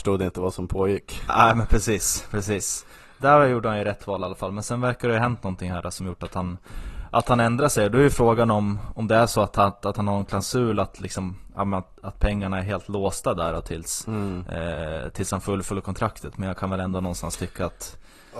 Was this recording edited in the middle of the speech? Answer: no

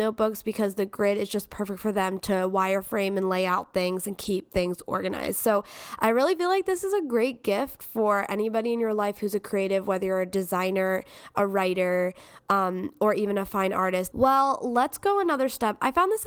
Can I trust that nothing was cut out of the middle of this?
no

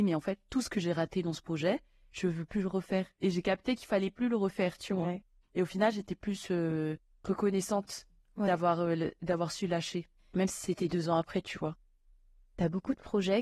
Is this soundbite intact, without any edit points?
yes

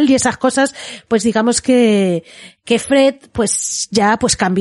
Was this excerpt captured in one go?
yes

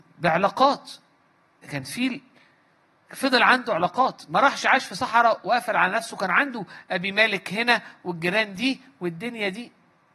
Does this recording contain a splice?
yes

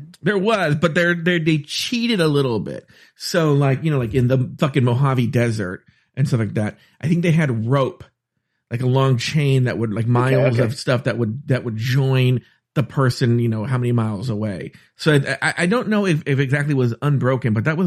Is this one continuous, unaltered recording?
yes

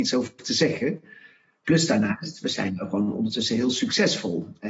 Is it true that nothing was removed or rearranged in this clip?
yes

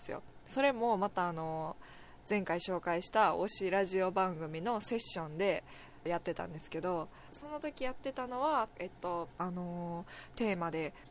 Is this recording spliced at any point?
yes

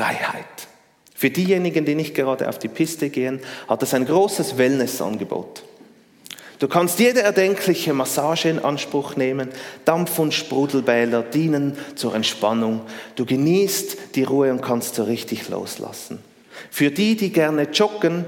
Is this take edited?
no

